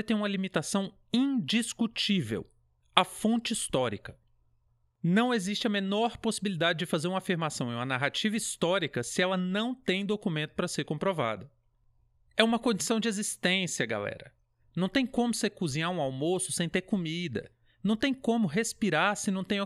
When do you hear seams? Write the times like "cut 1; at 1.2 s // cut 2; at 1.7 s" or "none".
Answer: none